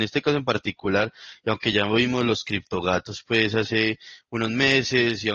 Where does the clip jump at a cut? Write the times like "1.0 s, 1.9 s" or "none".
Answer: none